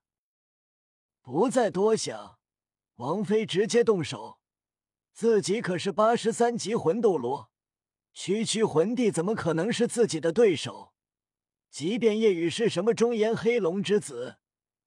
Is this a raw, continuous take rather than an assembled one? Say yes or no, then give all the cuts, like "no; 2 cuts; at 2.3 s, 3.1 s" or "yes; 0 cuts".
yes; 0 cuts